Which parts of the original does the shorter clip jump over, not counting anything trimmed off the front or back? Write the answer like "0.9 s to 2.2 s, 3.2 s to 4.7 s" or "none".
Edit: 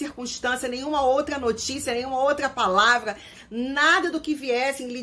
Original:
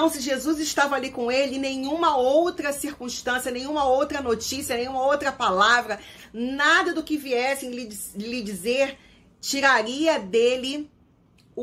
none